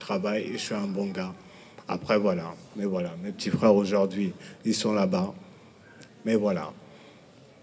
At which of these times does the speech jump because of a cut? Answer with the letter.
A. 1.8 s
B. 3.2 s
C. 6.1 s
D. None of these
C